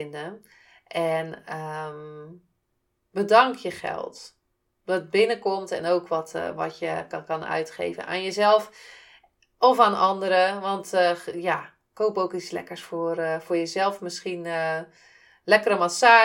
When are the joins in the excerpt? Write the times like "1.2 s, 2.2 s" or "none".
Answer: none